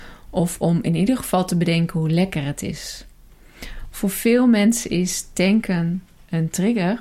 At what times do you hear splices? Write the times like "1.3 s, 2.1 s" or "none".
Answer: 3.9 s